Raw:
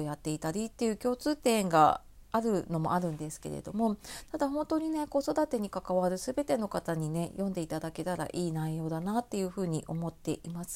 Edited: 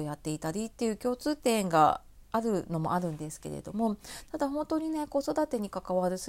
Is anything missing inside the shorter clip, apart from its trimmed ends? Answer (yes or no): no